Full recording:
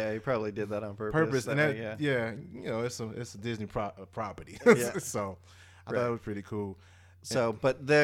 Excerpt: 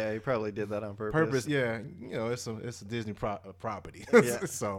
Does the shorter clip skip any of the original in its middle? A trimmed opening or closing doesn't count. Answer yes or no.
yes